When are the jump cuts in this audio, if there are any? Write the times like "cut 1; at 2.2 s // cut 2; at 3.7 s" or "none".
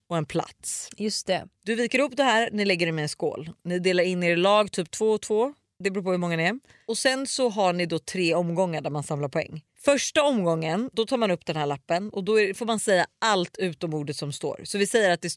cut 1; at 5.8 s